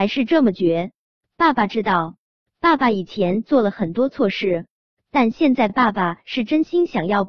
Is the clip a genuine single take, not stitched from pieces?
yes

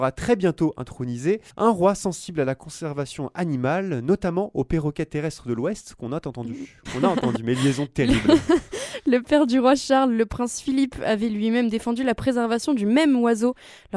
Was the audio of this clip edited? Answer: yes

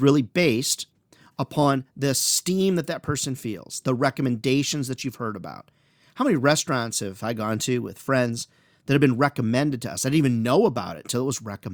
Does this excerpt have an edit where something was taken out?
no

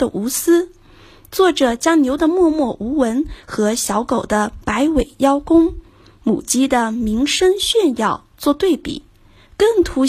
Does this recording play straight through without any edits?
yes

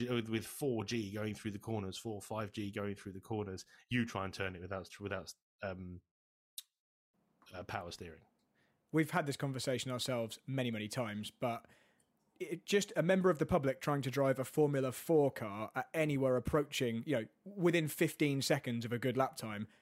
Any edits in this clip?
no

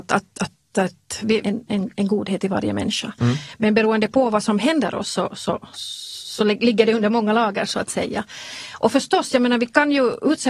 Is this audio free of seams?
no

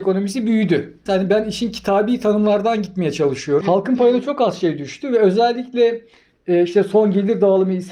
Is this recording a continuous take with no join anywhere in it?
no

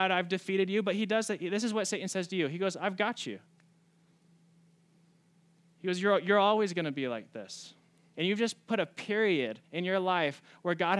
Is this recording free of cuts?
no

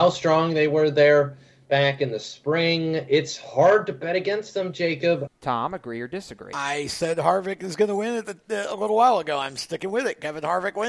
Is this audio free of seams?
no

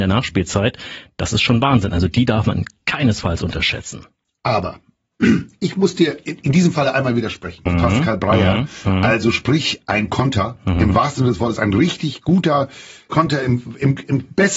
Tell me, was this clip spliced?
yes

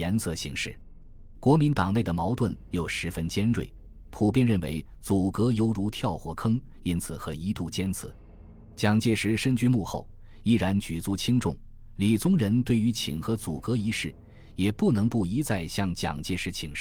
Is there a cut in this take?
yes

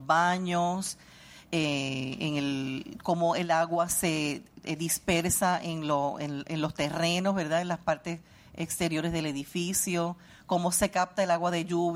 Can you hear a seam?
no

